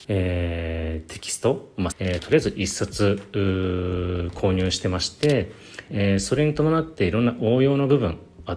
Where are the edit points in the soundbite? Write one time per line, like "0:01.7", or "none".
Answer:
0:01.9
0:05.9